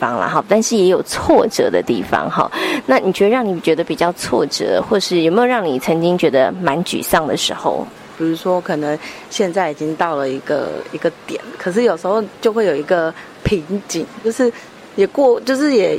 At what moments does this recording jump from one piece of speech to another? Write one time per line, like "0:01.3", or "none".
0:08.1
0:14.2